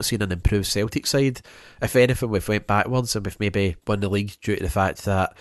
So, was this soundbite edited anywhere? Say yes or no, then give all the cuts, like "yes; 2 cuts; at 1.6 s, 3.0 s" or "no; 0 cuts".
no; 0 cuts